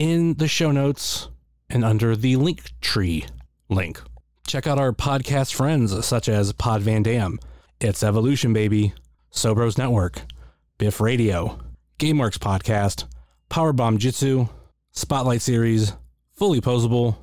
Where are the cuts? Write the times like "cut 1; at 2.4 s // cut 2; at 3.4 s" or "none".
cut 1; at 7.7 s // cut 2; at 9.2 s

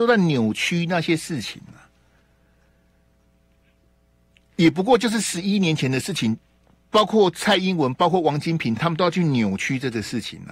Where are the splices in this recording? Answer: none

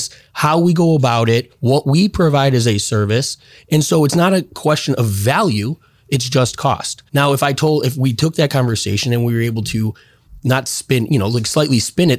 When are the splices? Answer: cut 1; at 7.1 s

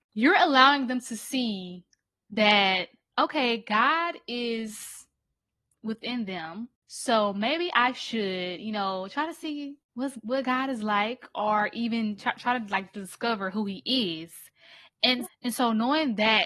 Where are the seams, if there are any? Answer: cut 1; at 15.2 s

